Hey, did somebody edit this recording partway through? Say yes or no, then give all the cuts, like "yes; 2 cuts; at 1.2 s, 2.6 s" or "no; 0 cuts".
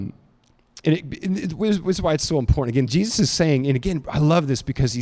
no; 0 cuts